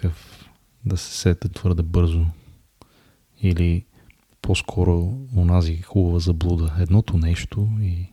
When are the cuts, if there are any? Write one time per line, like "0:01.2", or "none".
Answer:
0:01.5